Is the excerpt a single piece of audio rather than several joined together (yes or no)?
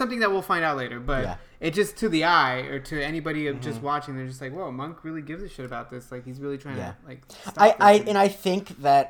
yes